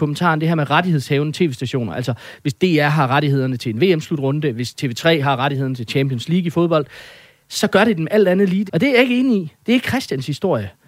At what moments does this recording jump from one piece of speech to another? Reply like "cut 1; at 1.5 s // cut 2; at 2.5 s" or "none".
cut 1; at 8.7 s